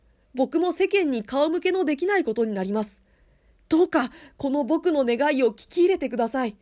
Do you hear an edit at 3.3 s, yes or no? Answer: no